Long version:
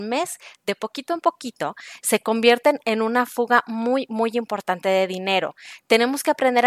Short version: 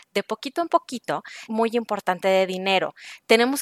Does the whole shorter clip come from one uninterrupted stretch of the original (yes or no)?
no